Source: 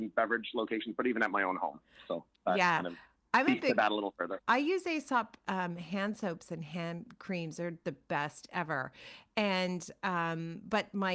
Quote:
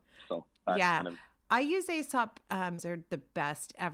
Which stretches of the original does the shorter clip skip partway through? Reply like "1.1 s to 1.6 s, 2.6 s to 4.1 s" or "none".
3.2 s to 4.4 s, 5.8 s to 7.5 s